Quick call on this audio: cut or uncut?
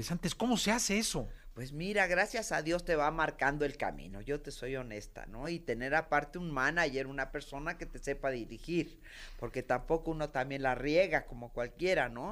uncut